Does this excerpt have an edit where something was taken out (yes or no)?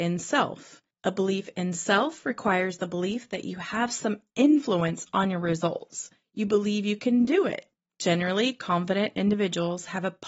no